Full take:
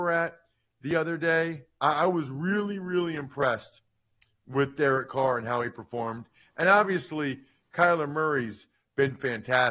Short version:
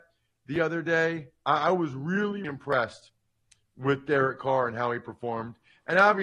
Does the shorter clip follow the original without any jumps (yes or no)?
no